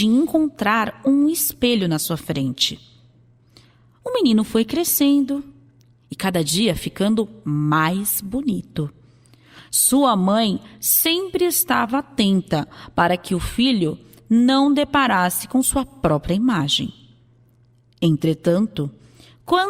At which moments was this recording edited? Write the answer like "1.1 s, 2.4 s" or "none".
none

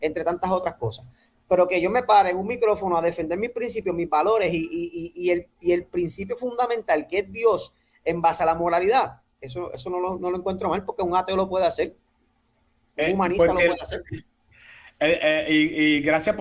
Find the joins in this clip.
none

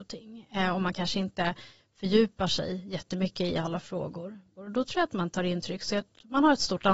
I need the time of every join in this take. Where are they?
4.6 s

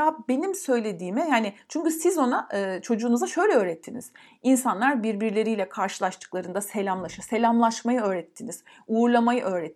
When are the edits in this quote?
none

